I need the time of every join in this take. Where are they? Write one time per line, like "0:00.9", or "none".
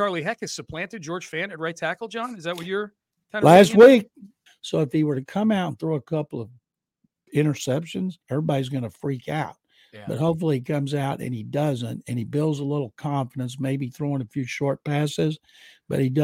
0:04.5
0:08.2